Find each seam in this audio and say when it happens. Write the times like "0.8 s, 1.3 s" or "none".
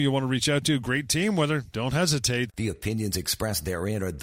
2.5 s